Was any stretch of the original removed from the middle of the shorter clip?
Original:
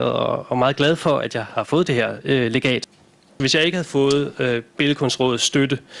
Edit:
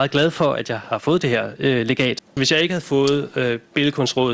yes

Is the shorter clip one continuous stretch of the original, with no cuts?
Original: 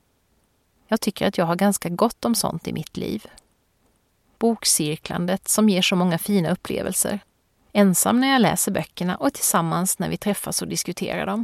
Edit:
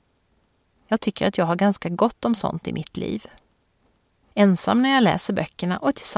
no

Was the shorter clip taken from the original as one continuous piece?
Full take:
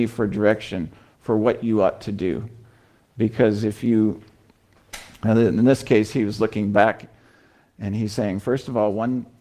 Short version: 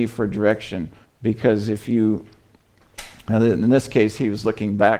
no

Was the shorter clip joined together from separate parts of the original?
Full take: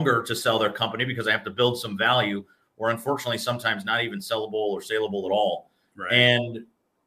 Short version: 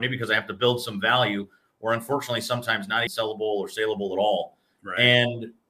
yes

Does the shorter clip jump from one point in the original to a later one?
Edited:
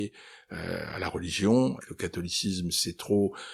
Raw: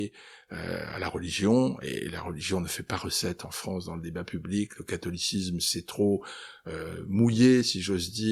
yes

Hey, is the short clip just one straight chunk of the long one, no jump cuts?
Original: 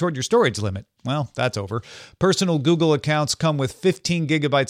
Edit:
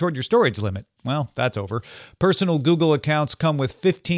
yes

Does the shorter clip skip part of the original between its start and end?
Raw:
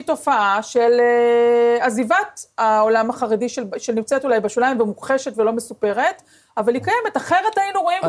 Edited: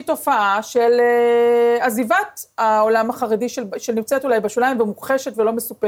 no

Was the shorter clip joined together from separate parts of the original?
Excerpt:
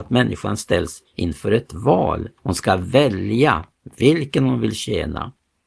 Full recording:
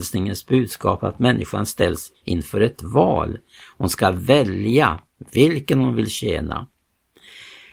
yes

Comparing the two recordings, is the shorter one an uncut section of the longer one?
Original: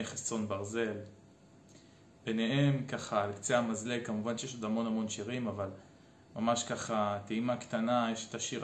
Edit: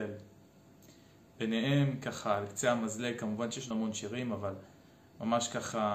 no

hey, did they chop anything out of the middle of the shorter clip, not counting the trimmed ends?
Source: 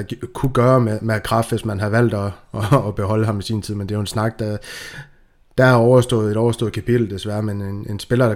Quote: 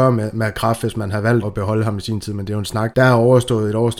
yes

